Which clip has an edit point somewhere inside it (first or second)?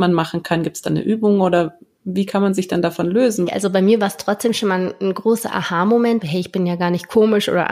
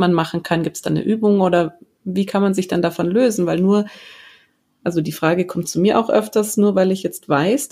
first